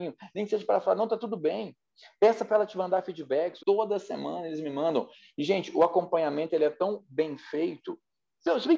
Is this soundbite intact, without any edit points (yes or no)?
no